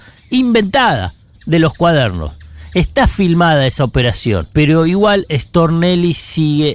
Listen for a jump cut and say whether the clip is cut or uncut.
cut